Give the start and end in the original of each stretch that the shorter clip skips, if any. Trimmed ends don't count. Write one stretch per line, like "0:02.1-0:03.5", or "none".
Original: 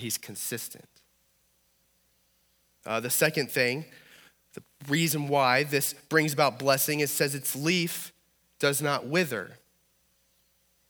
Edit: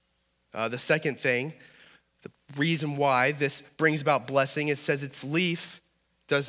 none